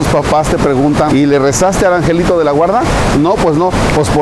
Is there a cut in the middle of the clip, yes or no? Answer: yes